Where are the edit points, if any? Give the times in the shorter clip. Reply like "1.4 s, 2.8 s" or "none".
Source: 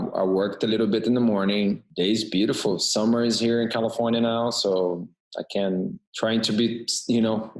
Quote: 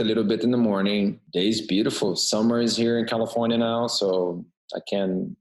none